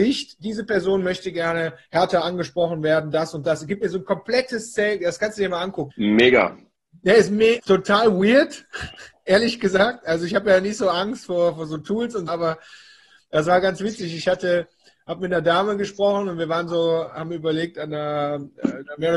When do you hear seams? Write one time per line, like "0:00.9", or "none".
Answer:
0:05.9
0:07.6
0:12.3